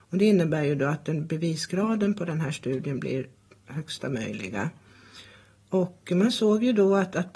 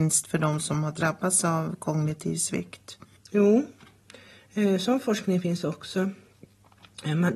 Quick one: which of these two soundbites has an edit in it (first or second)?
second